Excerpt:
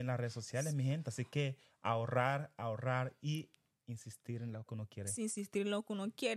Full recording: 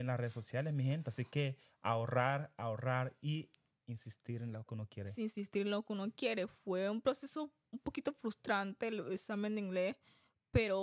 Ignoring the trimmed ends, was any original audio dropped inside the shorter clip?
no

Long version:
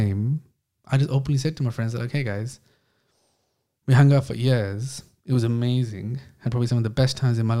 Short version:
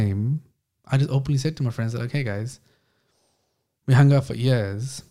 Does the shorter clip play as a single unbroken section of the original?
yes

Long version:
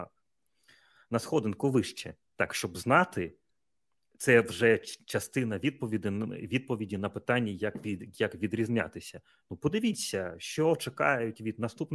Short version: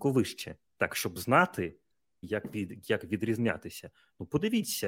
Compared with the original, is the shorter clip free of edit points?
no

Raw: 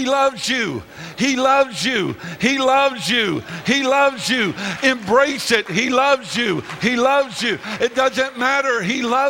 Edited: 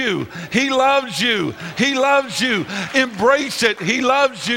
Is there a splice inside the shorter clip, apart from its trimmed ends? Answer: no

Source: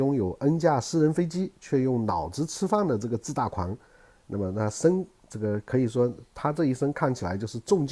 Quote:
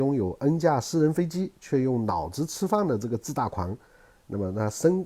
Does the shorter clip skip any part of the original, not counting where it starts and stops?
no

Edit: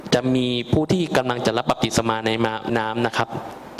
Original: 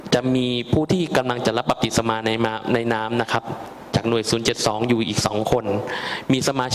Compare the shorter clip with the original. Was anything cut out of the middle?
yes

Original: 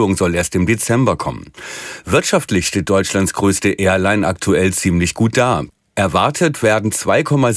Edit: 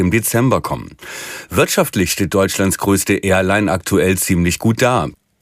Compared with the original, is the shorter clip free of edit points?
yes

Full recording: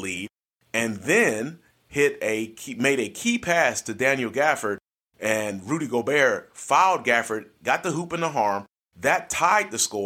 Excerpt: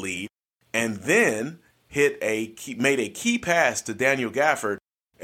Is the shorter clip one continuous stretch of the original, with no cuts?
yes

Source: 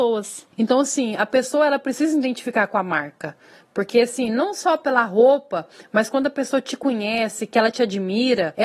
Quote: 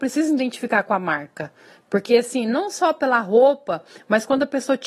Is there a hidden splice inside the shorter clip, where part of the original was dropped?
no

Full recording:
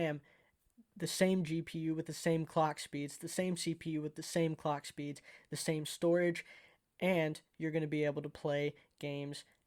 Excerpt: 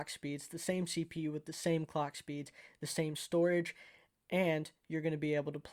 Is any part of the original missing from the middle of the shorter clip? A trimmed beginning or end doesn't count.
no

